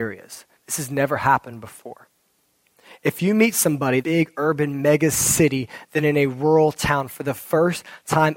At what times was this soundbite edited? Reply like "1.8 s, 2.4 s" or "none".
4.0 s